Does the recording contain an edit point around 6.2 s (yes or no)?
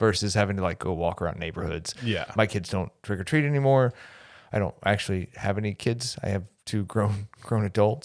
no